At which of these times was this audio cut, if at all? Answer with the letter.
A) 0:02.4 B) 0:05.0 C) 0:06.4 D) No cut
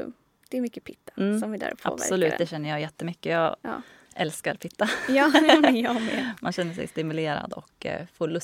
D